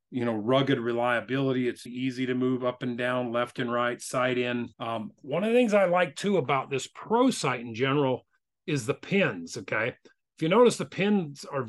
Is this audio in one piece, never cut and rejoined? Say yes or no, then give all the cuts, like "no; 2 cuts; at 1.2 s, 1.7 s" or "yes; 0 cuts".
no; 2 cuts; at 1.9 s, 4.7 s